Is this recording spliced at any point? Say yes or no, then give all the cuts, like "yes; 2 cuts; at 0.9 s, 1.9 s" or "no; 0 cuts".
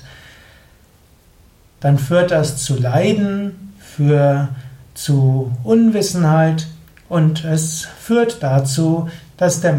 yes; 1 cut; at 1.8 s